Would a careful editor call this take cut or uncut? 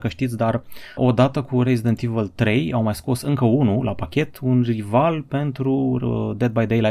cut